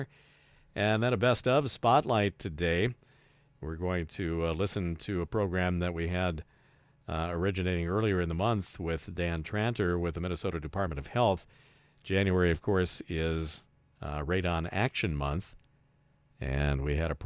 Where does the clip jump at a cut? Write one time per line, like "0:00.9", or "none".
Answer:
none